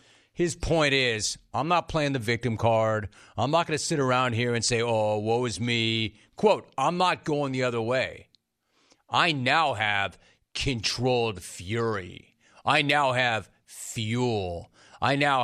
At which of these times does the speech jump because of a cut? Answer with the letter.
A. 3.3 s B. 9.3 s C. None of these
C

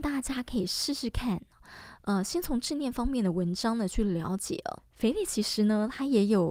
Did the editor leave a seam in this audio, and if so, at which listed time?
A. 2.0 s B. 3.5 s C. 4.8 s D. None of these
C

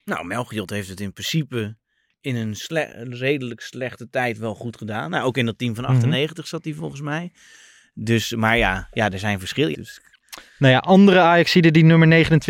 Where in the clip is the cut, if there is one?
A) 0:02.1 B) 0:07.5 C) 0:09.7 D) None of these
C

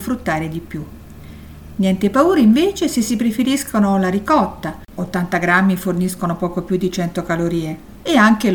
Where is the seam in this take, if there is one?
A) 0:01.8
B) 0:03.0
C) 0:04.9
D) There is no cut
D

